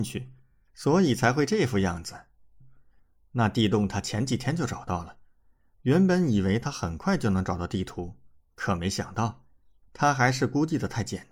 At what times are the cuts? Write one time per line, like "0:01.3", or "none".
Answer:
0:02.6